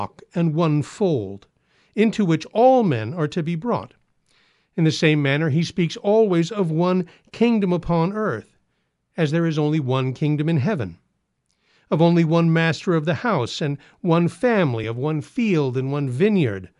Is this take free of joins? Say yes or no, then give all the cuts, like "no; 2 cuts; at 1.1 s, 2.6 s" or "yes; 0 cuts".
yes; 0 cuts